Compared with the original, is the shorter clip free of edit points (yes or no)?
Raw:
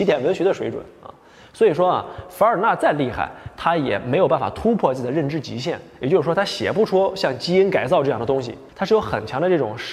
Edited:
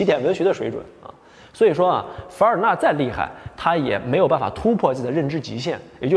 yes